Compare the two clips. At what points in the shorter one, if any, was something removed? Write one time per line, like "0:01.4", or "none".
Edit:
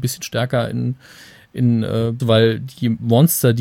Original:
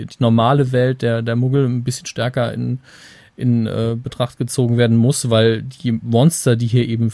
0:02.2